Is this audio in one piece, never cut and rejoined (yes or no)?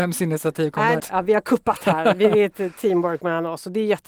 no